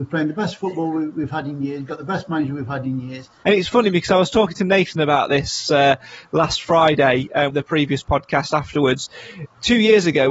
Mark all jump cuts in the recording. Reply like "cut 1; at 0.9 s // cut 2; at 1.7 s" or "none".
cut 1; at 3.4 s // cut 2; at 7.5 s